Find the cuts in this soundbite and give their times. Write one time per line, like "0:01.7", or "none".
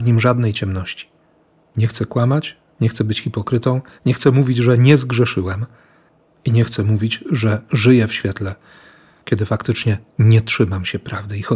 none